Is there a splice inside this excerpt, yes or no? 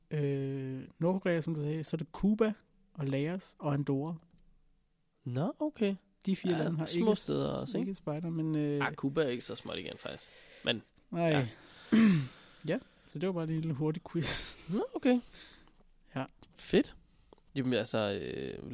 no